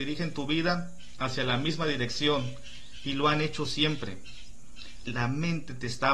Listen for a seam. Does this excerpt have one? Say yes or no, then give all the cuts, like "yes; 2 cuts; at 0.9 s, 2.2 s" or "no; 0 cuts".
yes; 1 cut; at 5.0 s